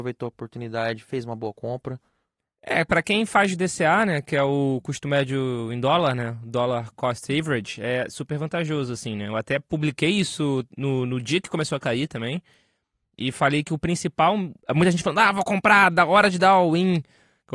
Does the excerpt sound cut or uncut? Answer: cut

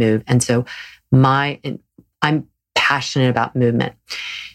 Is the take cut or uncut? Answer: uncut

